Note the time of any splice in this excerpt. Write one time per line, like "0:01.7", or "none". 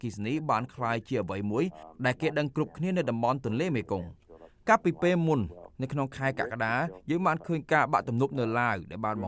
none